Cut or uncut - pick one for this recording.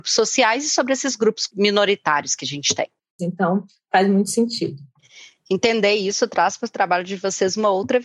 cut